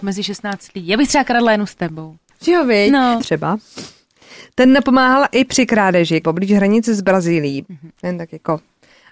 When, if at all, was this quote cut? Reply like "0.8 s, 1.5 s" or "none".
3.2 s, 6.2 s, 7.6 s